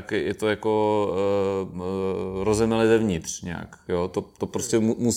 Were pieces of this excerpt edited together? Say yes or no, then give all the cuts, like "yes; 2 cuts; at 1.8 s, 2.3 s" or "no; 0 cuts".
yes; 1 cut; at 1.7 s